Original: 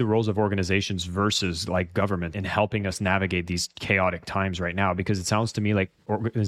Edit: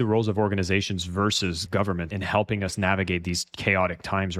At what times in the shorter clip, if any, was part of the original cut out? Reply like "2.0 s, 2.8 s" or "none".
1.7 s